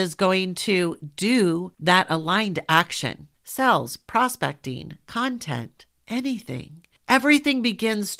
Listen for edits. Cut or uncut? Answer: cut